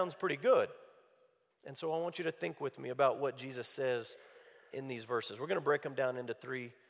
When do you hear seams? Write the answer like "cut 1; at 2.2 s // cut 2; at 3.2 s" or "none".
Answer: cut 1; at 1.5 s